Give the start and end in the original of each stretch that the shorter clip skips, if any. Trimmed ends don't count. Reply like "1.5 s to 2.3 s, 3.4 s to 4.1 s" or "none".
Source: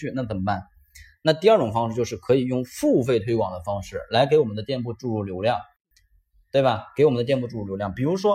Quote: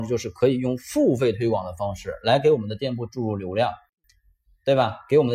none